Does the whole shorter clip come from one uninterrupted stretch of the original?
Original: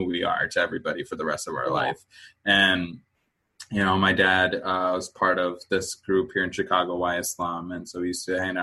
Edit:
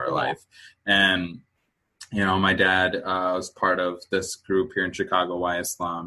yes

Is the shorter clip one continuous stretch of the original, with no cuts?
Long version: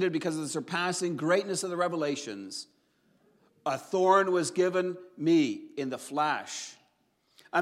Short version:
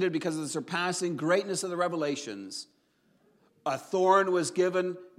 yes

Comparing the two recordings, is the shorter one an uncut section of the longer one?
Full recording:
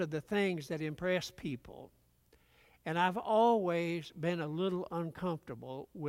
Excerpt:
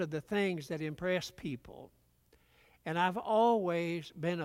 yes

